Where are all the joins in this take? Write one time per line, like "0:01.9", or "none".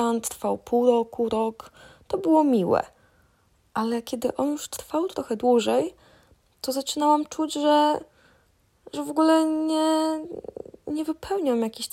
none

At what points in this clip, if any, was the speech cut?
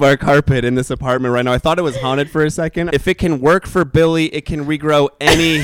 0:02.9

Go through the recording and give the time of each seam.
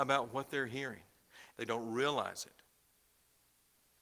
0:01.5

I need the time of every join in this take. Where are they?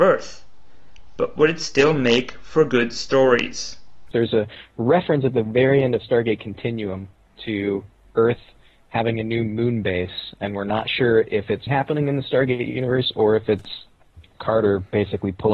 0:04.1
0:11.7

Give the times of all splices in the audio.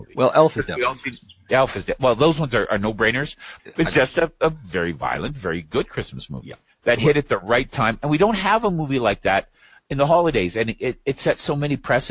0:03.6

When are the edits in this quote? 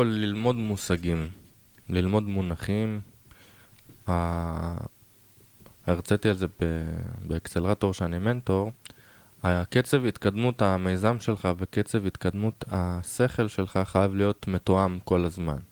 none

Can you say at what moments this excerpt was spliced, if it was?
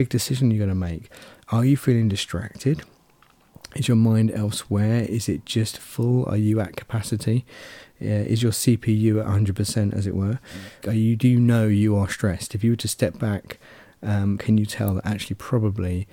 0:10.8
0:14.4

